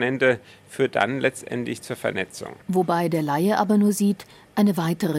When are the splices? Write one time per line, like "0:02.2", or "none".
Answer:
0:02.6